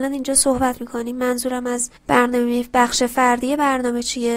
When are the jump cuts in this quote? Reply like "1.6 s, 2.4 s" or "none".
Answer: 2.0 s